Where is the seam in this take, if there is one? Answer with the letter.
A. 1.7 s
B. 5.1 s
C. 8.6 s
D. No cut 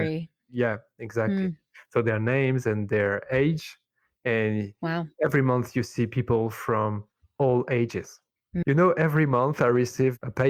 C